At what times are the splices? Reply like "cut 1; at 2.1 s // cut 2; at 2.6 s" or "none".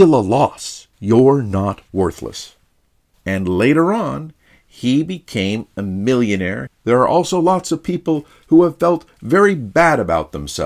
cut 1; at 0.9 s // cut 2; at 3.1 s // cut 3; at 6.7 s